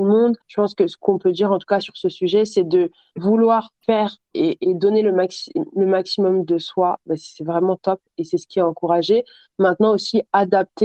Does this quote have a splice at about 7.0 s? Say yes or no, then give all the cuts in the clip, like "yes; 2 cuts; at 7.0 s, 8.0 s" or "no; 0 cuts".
no; 0 cuts